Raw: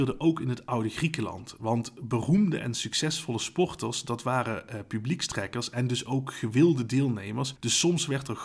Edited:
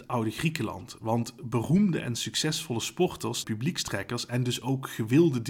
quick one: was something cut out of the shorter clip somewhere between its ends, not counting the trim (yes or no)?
yes